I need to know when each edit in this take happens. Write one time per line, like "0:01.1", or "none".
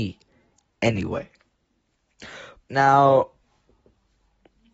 0:02.6